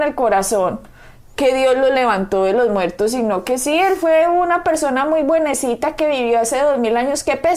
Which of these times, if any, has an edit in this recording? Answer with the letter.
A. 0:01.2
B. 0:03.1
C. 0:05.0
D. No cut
D